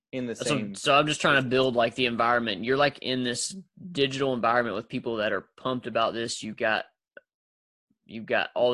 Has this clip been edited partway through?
no; 0 cuts

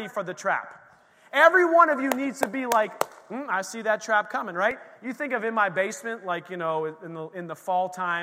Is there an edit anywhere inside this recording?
no; 0 cuts

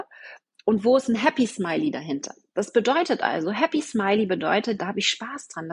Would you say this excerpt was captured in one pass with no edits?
no; 1 cut; at 4.8 s

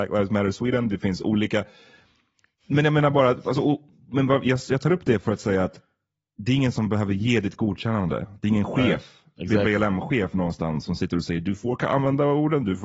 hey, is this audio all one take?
yes; 0 cuts

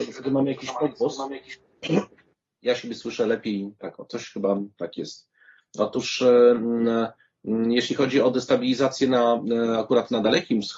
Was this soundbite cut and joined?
no; 0 cuts

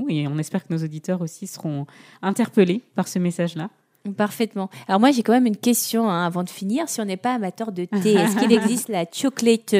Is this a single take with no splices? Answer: yes; 0 cuts

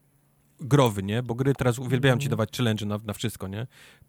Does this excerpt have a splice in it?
no; 0 cuts

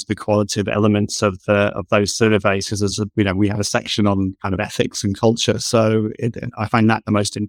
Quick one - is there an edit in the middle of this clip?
no; 0 cuts

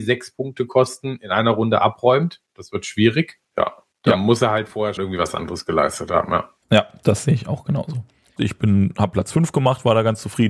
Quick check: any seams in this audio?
yes; 2 cuts; at 5.0 s, 8.4 s

